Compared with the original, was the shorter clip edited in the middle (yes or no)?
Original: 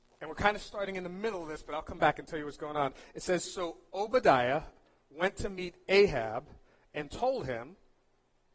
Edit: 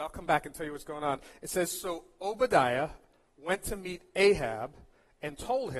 no